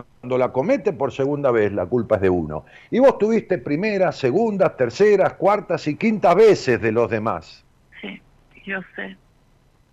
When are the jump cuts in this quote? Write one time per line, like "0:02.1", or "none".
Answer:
0:07.9